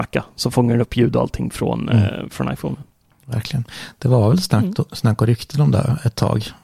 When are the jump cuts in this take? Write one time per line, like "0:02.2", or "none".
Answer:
none